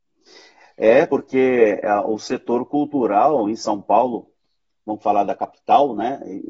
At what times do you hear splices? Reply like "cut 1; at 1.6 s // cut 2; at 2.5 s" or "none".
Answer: none